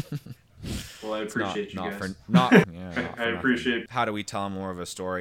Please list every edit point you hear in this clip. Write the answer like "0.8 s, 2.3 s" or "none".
2.6 s, 3.9 s